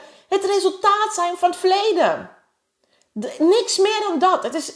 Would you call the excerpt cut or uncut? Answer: uncut